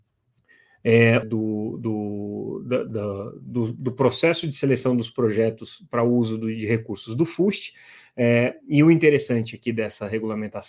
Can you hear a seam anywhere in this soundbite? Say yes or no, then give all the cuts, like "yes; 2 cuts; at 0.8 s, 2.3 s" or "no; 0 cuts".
yes; 1 cut; at 1.2 s